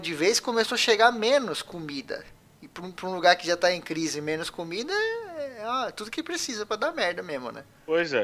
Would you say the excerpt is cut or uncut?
uncut